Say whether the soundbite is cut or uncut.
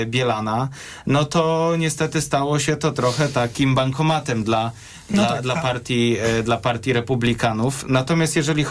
uncut